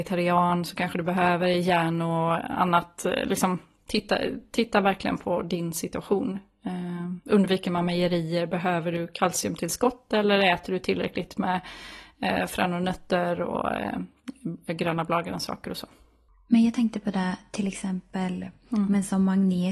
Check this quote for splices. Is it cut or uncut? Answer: uncut